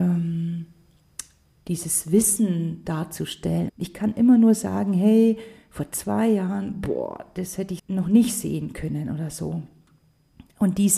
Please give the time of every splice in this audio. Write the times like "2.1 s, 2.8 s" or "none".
3.7 s, 7.8 s